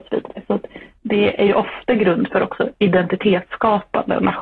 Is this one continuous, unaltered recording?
yes; 0 cuts

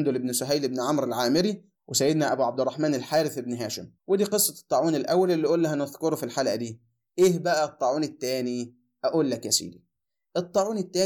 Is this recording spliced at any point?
yes; 1 cut; at 4.0 s

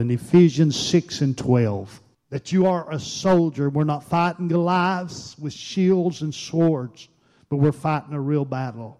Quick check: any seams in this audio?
yes; 1 cut; at 2.1 s

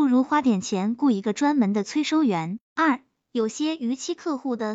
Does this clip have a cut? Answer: yes; 1 cut; at 2.6 s

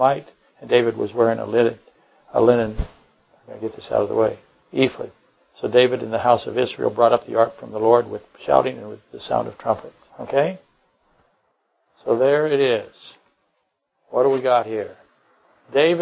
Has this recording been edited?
yes; 1 cut; at 10.1 s

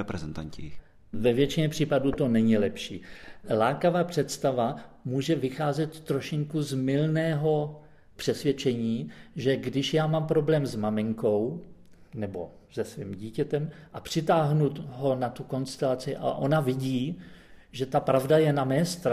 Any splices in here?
no; 0 cuts

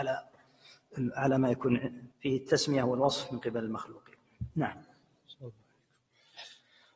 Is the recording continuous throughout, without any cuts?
no; 1 cut; at 2.1 s

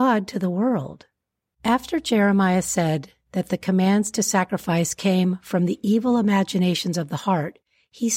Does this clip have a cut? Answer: yes; 1 cut; at 1.5 s

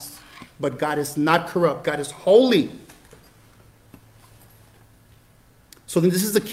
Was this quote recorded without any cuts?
yes; 0 cuts

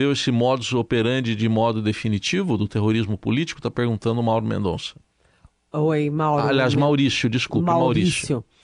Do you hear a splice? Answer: no; 0 cuts

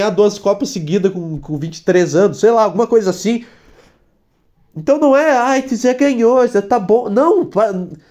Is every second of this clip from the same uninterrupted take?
yes; 0 cuts

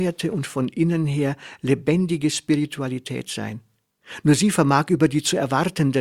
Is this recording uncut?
yes; 0 cuts

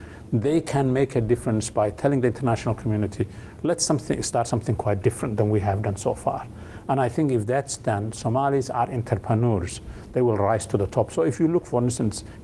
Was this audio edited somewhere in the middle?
no; 0 cuts

